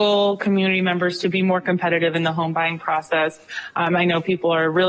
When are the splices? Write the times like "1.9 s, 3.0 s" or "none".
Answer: none